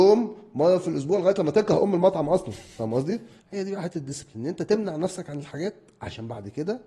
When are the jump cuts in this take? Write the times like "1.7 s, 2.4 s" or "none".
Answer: 3.4 s